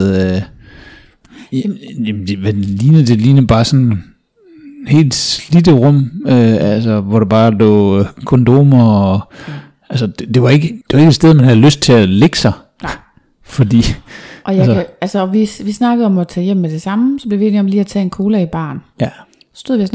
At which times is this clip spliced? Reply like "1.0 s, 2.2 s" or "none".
10.8 s